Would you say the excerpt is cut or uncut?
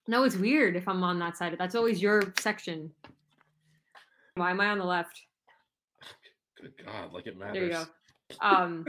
cut